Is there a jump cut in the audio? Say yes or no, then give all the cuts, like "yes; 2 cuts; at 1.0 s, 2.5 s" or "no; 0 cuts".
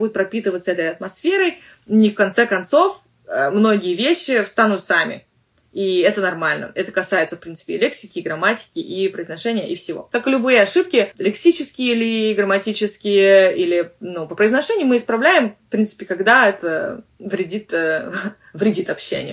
no; 0 cuts